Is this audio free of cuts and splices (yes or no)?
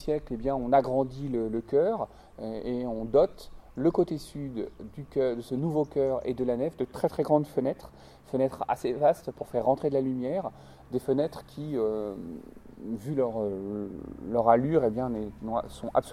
yes